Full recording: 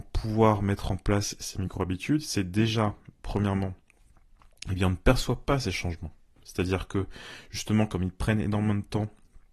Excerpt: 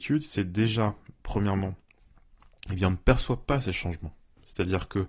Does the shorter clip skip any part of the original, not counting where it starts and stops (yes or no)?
no